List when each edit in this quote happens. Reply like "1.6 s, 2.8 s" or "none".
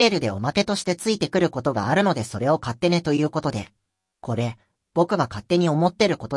none